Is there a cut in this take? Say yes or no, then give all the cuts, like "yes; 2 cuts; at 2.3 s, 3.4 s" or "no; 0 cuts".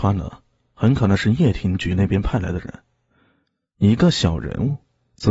no; 0 cuts